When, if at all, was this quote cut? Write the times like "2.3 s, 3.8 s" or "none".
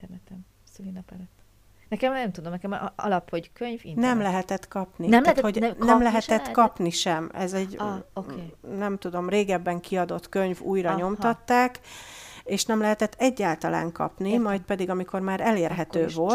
none